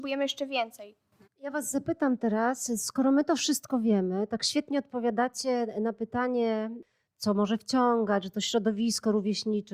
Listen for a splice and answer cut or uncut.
cut